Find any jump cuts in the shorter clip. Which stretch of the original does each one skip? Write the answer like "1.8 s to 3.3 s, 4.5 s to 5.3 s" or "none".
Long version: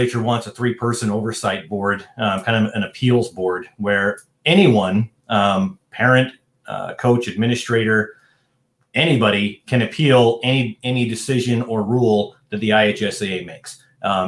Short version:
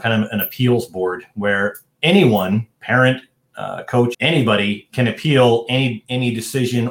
5.2 s to 5.8 s, 7.3 s to 8.9 s

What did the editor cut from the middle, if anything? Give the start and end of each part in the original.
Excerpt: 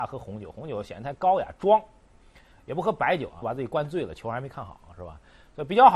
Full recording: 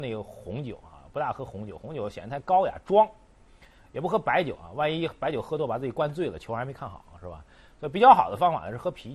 4.7 s to 5.7 s

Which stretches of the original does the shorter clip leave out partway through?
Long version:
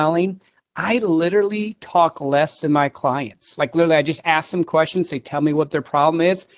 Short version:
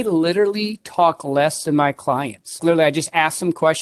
3.6 s to 3.7 s

